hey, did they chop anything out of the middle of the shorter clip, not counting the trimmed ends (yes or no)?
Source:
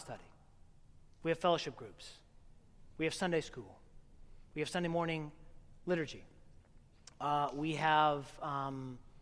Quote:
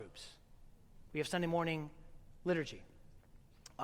yes